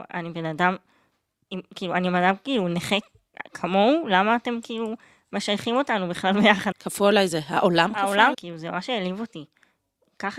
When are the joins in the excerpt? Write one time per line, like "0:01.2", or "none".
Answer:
0:06.7
0:08.3

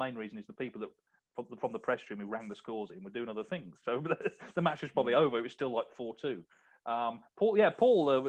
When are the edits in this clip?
none

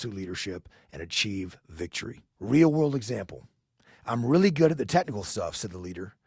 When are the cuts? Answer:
0:02.3

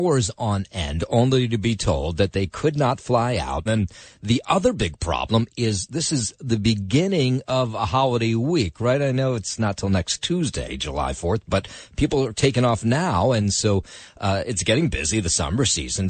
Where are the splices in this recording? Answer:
0:03.7

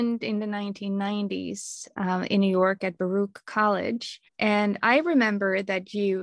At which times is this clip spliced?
0:04.3

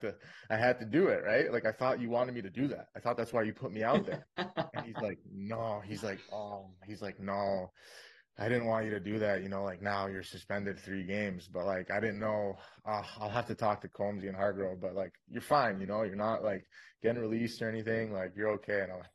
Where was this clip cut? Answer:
none

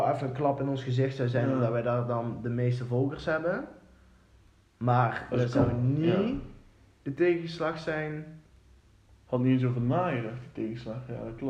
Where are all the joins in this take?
none

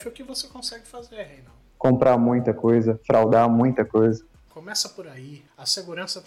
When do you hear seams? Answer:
0:01.7
0:04.5

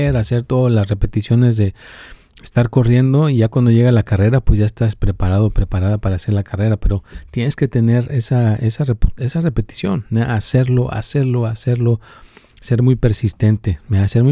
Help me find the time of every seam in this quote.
none

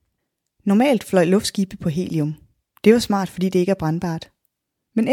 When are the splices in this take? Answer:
none

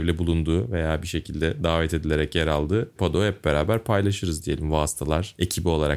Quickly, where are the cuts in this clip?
none

